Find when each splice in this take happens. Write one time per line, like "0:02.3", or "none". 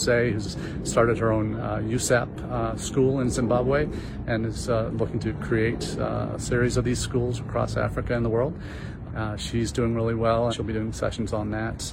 0:09.1
0:10.5